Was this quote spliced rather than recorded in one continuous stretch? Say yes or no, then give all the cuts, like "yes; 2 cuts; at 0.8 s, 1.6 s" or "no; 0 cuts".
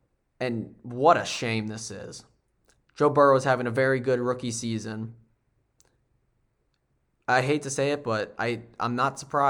no; 0 cuts